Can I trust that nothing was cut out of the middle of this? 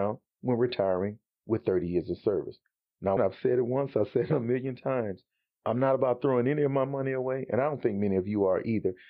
no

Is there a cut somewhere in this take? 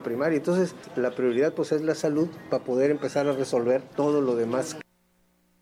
no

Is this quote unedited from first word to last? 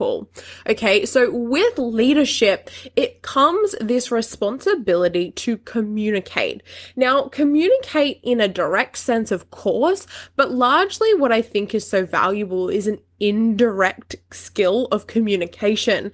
yes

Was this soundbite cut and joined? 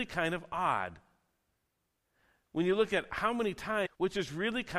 no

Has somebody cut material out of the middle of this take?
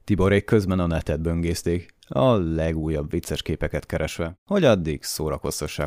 no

